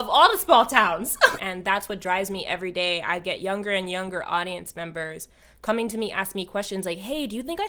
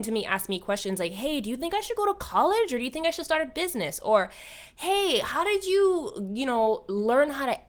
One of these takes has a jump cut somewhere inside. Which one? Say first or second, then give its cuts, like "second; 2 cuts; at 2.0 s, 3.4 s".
first; 1 cut; at 1.4 s